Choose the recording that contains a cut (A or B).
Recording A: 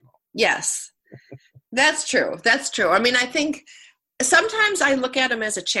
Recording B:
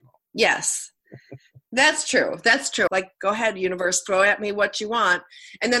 B